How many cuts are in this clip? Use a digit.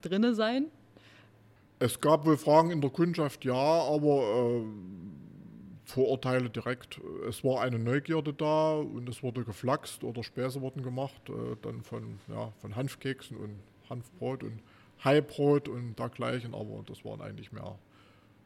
0